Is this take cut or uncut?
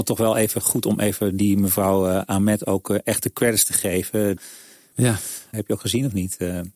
cut